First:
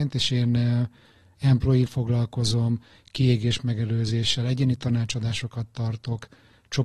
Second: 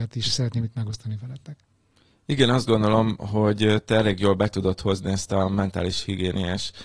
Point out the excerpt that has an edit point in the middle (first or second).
first